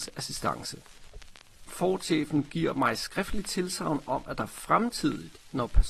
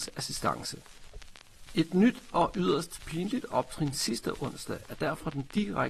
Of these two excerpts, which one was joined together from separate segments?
first; 1 cut; at 1.7 s

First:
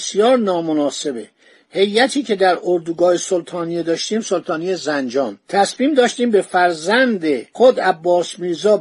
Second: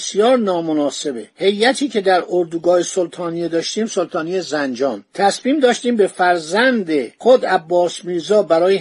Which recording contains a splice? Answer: second; 1 cut; at 1.3 s

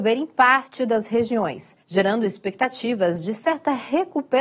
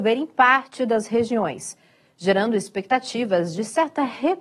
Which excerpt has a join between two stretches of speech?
first; 1 cut; at 1.8 s

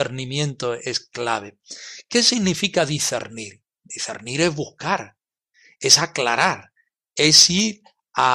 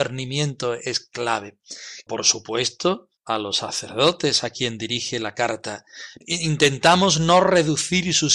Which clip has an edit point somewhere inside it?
second; 3 cuts; at 2.1 s, 3.2 s, 6.2 s

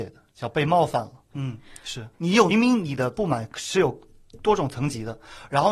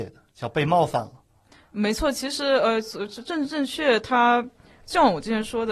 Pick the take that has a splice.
first; 2 cuts; at 1.3 s, 2.5 s

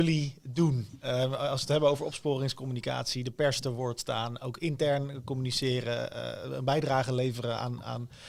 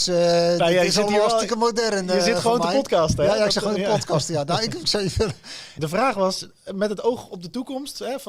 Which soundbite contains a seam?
second; 1 cut; at 5.8 s

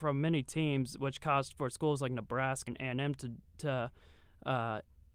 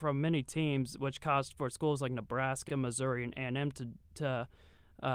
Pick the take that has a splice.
first; 1 cut; at 2.7 s

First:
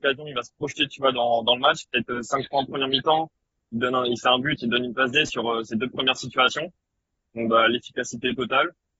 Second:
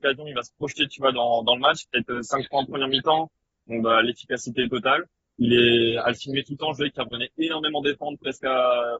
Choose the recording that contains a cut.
second; 2 cuts; at 3.5 s, 5.2 s

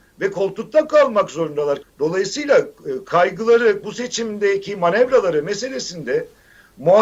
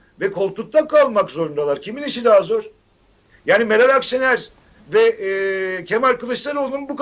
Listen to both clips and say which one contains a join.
first; 2 cuts; at 1.8 s, 3.8 s

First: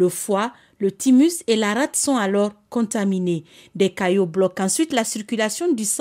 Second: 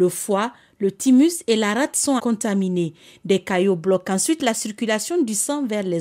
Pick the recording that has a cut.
second; 1 cut; at 2.2 s

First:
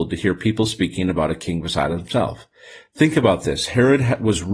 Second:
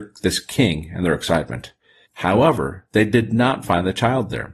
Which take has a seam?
second; 1 cut; at 2.0 s

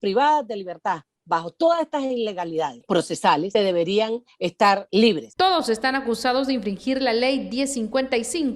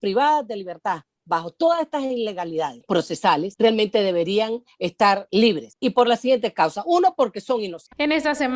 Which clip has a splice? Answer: first; 2 cuts; at 3.5 s, 5.4 s

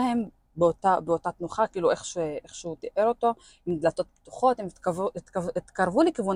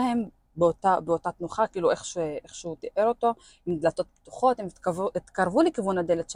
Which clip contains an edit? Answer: second; 1 cut; at 5.1 s

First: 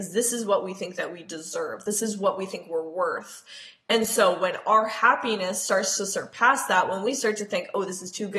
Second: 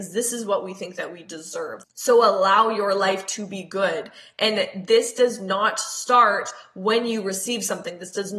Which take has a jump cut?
second; 1 cut; at 1.8 s

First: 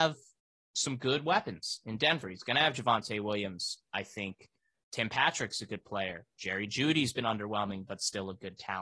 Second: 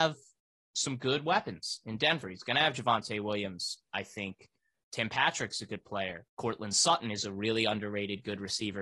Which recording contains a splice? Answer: second; 1 cut; at 6.3 s

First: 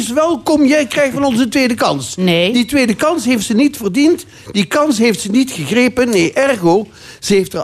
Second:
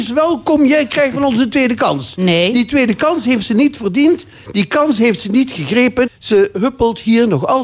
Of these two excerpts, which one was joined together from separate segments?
second; 1 cut; at 6.1 s

